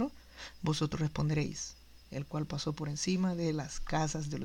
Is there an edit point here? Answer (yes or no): yes